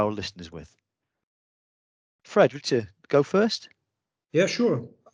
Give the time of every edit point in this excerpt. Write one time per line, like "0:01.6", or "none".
0:02.6